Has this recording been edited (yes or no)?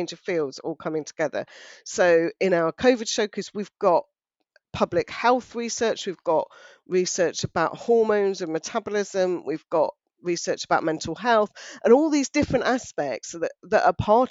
no